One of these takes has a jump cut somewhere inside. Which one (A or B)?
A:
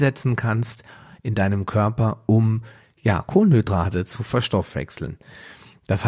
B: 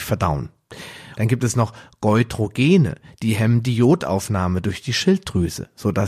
B